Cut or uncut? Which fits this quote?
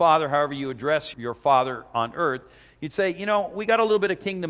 cut